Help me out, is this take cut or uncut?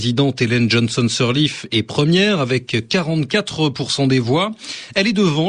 uncut